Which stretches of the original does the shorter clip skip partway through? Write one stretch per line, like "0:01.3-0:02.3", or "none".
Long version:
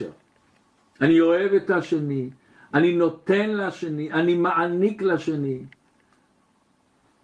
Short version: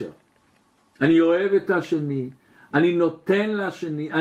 none